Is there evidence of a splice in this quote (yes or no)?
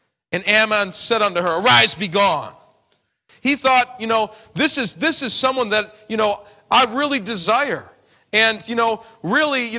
yes